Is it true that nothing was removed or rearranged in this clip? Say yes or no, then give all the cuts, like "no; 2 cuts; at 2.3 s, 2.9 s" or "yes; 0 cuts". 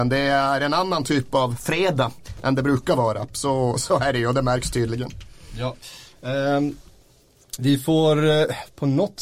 yes; 0 cuts